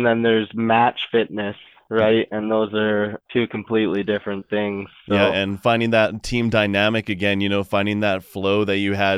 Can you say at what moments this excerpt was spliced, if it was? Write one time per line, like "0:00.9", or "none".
none